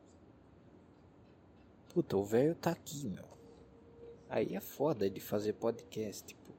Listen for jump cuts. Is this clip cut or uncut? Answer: uncut